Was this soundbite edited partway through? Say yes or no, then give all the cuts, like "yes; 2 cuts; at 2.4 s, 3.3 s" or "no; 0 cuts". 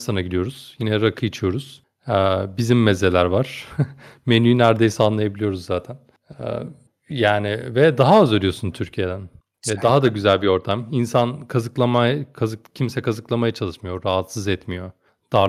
no; 0 cuts